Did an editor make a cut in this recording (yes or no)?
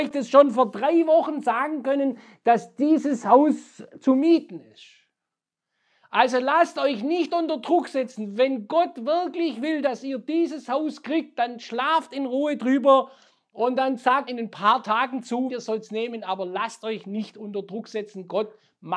yes